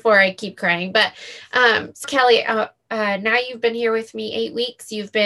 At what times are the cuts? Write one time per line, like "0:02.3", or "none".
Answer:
0:02.0